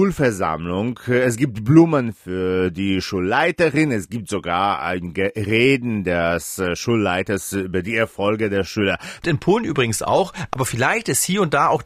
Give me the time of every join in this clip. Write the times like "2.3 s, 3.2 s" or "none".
9.2 s